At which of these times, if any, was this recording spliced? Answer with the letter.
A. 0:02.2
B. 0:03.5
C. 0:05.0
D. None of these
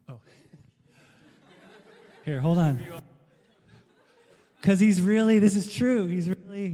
D